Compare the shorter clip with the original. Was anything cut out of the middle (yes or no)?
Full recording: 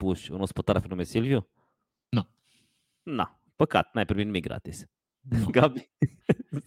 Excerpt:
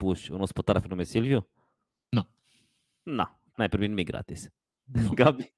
yes